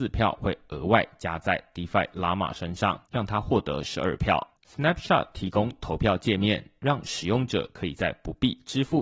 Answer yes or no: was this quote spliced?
yes